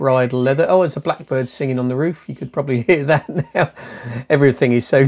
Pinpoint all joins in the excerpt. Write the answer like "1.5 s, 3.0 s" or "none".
none